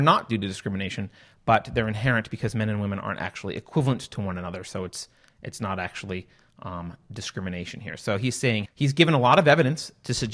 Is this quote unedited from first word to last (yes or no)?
no